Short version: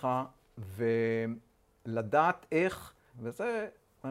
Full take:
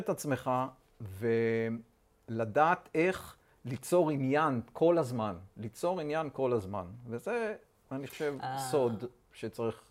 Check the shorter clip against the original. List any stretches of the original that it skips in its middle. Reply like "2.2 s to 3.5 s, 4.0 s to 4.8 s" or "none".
3.6 s to 7.0 s

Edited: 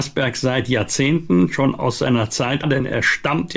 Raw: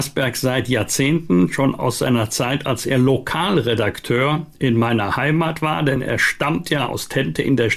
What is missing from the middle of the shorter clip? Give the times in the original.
2.6 s to 5.8 s

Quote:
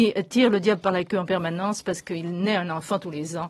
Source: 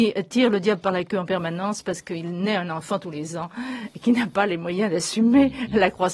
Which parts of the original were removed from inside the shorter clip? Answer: none

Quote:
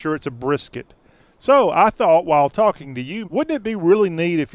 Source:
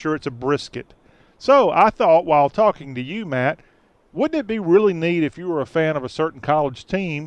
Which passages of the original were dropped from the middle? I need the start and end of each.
3.2 s to 4.1 s

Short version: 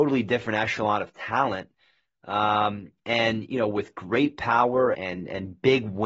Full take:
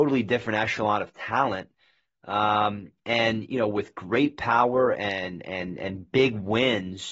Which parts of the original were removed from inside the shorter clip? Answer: 4.9 s to 5.4 s

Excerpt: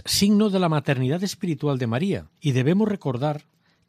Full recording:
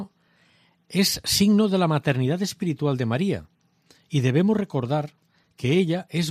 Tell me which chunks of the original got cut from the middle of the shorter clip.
3.5 s to 4.0 s

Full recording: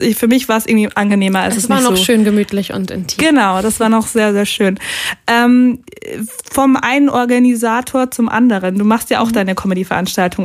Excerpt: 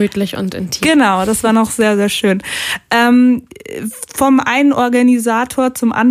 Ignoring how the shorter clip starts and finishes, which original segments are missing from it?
none

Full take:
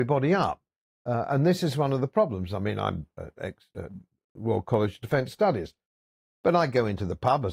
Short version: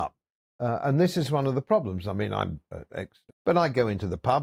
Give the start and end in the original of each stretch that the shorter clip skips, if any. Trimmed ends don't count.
3.7 s to 6.3 s

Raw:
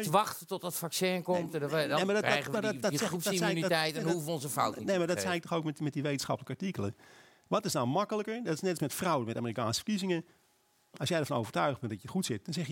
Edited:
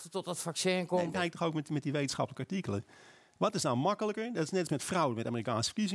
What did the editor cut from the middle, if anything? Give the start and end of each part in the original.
1.5 s to 5.2 s

